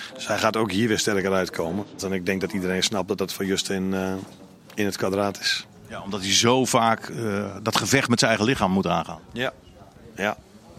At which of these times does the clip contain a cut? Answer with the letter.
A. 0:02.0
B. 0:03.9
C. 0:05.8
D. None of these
A